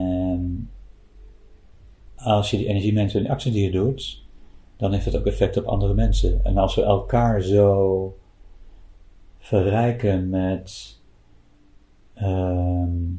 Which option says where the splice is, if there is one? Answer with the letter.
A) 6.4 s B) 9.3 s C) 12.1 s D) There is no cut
D